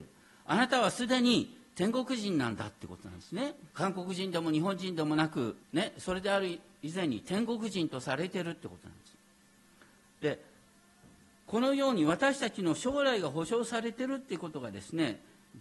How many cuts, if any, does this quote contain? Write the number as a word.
two